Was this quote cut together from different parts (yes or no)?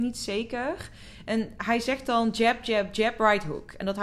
no